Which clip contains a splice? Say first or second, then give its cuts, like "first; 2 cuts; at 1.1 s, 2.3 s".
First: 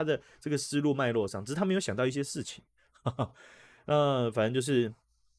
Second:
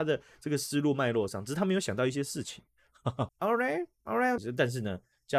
second; 2 cuts; at 3.3 s, 4.4 s